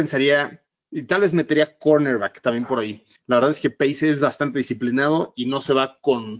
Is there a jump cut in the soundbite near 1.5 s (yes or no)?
no